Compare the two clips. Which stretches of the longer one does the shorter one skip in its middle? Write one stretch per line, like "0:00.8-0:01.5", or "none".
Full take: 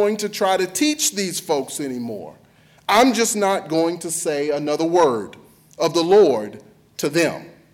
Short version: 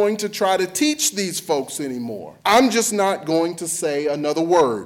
0:02.4-0:02.8